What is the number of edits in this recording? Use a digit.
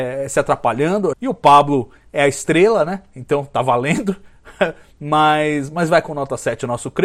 1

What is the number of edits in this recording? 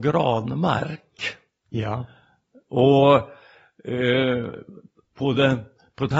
0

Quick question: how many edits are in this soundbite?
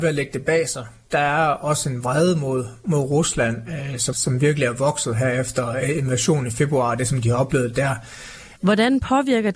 2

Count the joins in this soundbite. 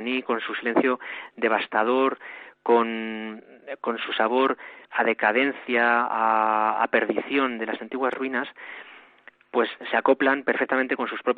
1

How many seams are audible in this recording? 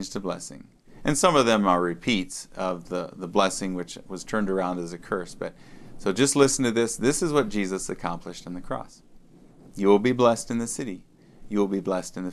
0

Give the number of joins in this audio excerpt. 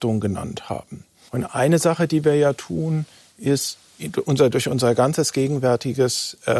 1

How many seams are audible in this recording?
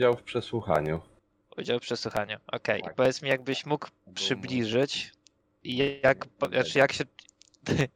0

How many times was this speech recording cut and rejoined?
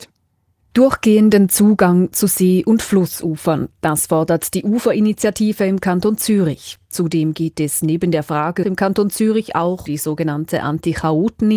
2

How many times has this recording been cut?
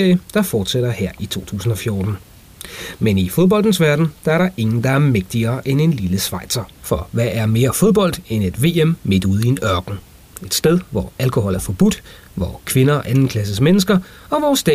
2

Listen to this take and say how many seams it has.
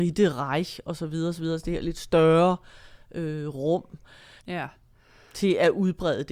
1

